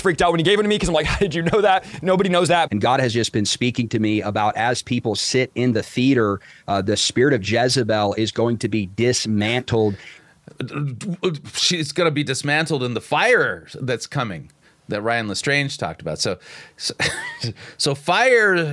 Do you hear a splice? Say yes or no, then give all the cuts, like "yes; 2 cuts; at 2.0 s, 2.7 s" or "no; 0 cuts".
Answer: yes; 1 cut; at 2.7 s